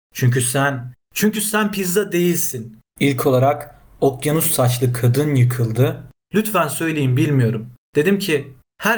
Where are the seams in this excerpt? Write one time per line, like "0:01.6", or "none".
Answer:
0:02.9
0:06.1